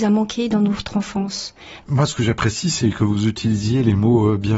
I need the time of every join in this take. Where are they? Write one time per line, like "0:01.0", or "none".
0:01.8